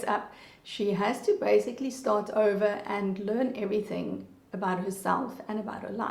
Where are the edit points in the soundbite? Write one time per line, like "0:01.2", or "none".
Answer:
none